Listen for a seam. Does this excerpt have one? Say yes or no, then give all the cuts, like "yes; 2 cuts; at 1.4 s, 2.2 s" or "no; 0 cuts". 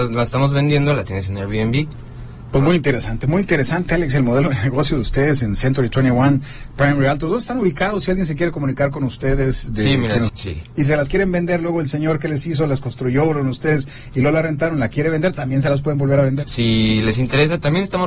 yes; 2 cuts; at 10.3 s, 16.4 s